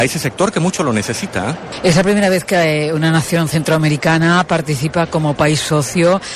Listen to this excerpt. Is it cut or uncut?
uncut